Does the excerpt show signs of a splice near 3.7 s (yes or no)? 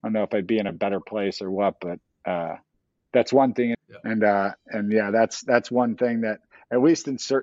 yes